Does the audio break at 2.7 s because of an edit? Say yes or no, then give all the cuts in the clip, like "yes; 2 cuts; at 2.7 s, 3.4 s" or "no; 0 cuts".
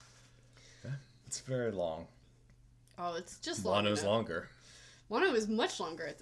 no; 1 cut; at 1.2 s